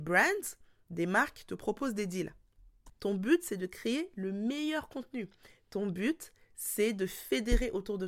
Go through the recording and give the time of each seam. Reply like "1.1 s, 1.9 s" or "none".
2.9 s

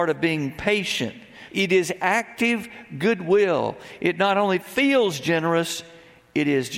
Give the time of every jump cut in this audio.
1.5 s

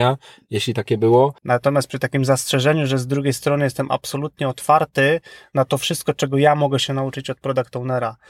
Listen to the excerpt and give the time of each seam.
1.4 s

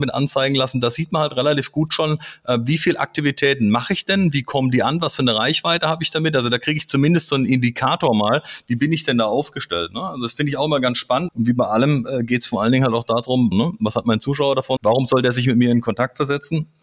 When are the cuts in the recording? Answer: 11.3 s, 13.5 s, 14.8 s

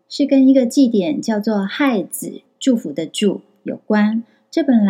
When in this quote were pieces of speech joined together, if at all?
2.5 s

